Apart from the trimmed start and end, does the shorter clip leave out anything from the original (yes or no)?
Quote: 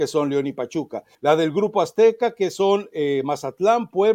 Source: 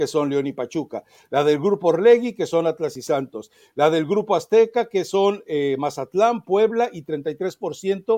yes